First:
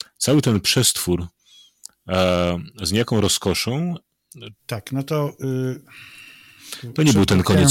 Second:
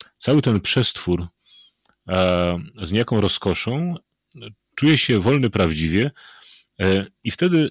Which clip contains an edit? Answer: first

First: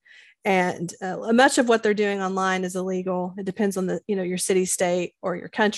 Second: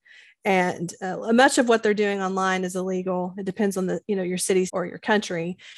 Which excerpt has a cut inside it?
second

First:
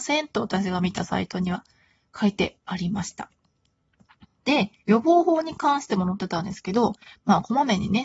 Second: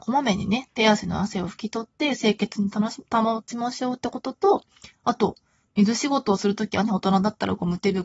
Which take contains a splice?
first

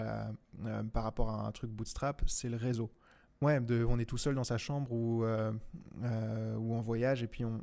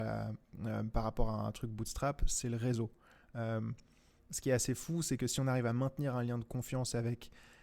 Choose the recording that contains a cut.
first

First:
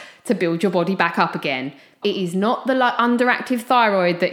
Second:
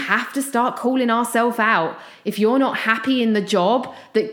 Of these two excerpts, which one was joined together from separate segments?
first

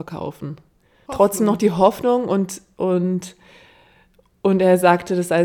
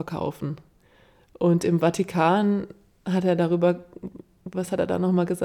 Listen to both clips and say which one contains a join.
first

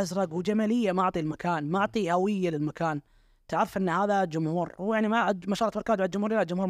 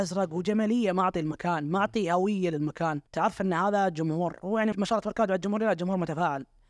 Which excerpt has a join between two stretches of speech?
second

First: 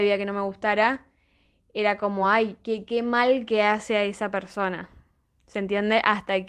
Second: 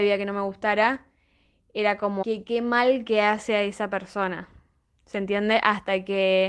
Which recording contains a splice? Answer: second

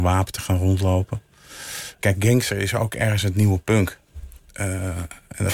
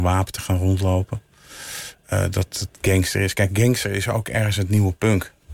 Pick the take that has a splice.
first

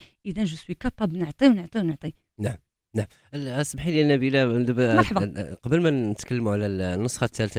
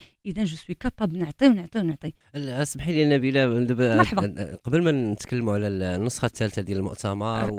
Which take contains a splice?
second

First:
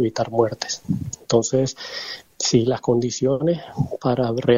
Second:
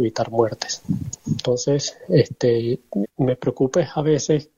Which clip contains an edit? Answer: second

